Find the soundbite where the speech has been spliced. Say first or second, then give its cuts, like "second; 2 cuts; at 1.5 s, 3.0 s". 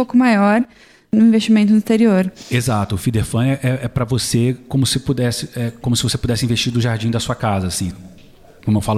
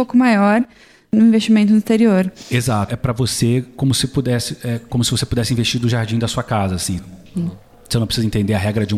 second; 2 cuts; at 2.9 s, 7.3 s